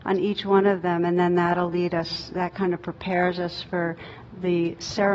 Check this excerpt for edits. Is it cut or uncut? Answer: uncut